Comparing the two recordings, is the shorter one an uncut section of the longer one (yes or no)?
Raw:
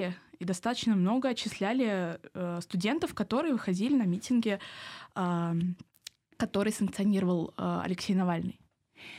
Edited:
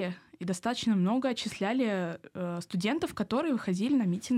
yes